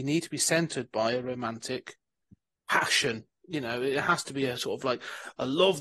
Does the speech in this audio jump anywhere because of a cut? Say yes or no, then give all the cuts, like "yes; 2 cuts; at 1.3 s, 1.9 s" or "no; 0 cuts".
no; 0 cuts